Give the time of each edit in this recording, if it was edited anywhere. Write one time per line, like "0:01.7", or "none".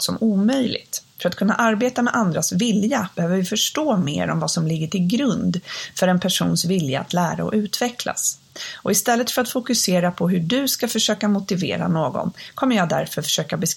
none

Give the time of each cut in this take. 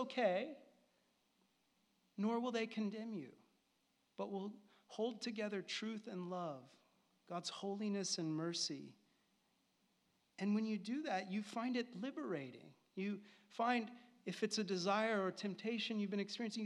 none

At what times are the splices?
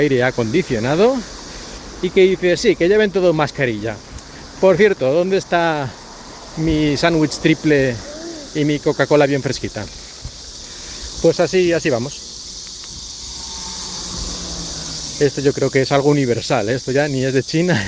0:02.6

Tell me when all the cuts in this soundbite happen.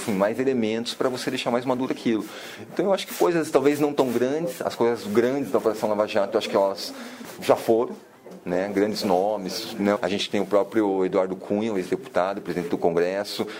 0:09.9

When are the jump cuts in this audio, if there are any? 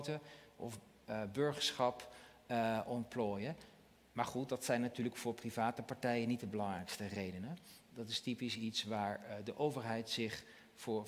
none

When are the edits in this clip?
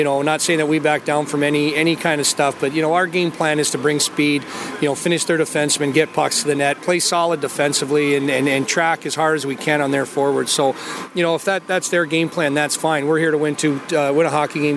none

